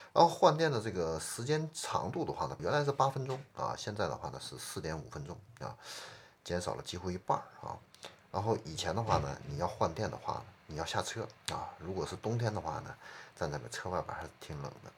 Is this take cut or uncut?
cut